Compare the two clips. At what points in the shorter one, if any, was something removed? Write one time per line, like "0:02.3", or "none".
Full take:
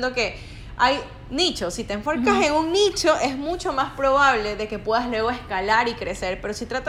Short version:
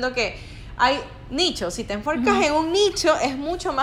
none